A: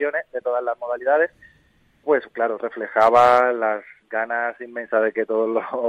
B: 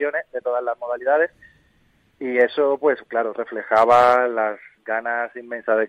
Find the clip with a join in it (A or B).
A